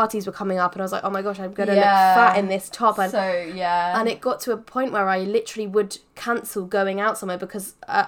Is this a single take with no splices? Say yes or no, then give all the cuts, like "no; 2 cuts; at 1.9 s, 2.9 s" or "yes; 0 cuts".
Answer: yes; 0 cuts